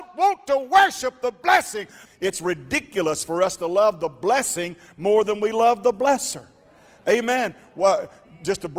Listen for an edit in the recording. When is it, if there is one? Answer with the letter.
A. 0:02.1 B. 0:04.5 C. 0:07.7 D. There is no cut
A